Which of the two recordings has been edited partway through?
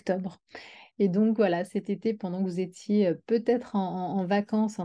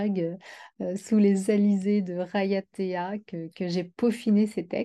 first; 1 cut; at 0.9 s

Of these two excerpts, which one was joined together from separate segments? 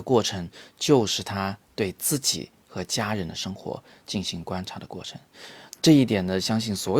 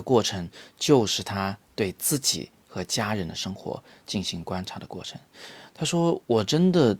first; 1 cut; at 5.7 s

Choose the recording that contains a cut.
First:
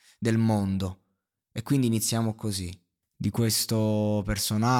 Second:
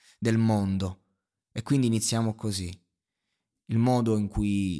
first; 1 cut; at 3.0 s

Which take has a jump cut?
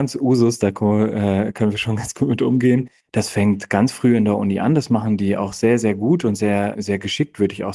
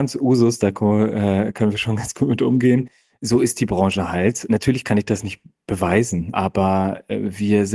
first; 1 cut; at 3.0 s

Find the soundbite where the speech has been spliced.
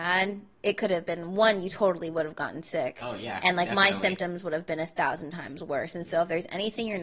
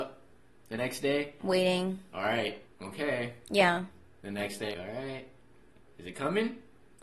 second; 1 cut; at 4.7 s

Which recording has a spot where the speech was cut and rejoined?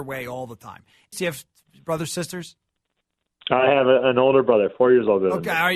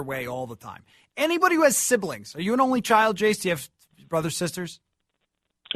first; 1 cut; at 1.1 s

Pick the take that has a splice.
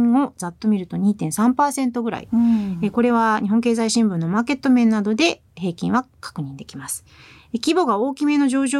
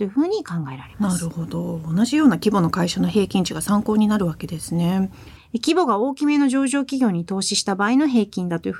second; 1 cut; at 5.4 s

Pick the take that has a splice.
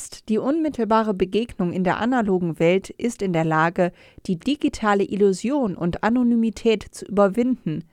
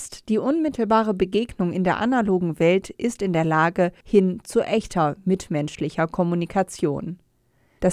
second; 1 cut; at 4.0 s

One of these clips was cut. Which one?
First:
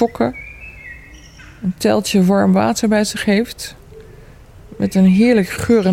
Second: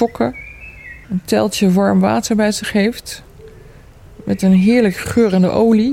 second; 1 cut; at 1.0 s

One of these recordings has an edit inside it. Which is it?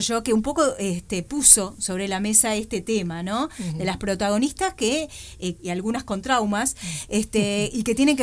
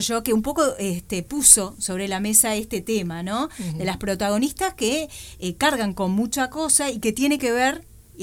first; 1 cut; at 5.5 s

